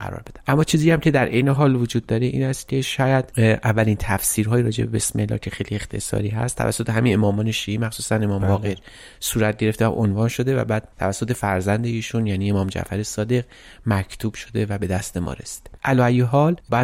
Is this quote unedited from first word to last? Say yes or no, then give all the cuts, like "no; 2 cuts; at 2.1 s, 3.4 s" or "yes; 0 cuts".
yes; 0 cuts